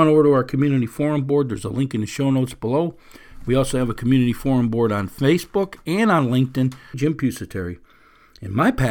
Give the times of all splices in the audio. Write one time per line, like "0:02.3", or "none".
0:06.9